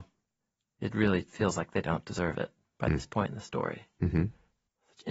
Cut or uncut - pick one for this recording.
uncut